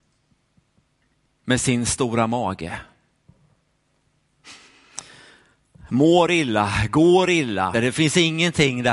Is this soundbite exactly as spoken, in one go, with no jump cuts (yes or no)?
no